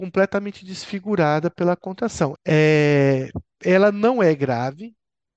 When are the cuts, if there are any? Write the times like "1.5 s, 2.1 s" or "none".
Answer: 2.4 s